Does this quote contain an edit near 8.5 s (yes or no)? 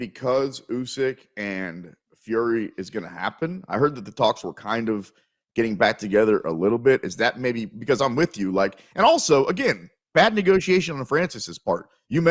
no